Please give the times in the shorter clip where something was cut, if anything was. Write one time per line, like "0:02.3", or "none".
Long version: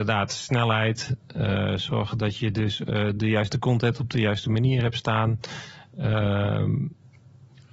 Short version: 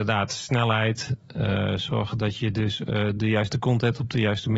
none

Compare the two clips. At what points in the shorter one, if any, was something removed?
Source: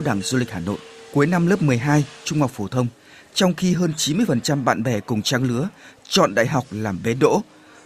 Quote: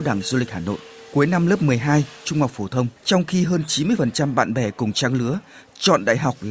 0:03.0

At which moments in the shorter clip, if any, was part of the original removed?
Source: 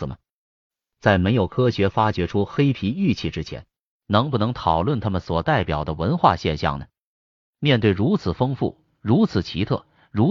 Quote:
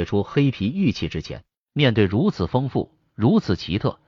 0:01.7

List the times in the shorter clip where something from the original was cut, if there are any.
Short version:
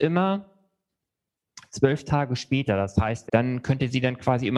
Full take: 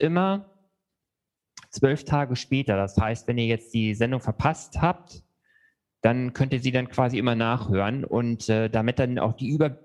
0:03.3

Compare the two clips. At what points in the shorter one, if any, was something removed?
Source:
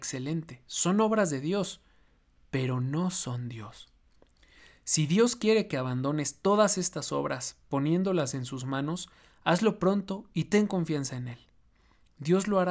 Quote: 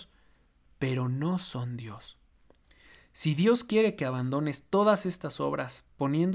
none

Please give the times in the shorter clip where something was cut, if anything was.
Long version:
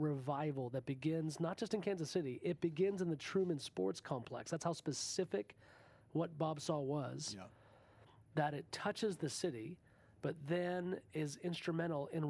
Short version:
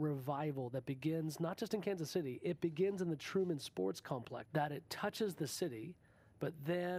0:04.4

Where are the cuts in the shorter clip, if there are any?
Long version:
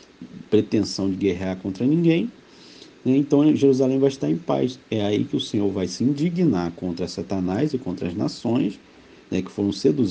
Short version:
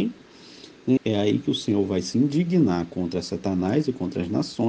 0:01.0

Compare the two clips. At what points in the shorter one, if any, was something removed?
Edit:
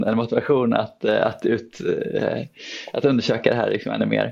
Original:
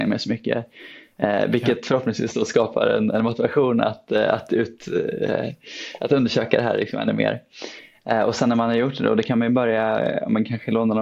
none

